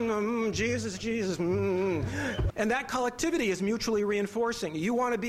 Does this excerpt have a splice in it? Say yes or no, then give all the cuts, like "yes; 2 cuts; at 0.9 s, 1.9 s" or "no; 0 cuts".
yes; 1 cut; at 2.5 s